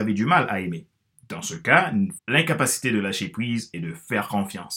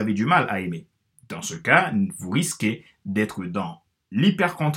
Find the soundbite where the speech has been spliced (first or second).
first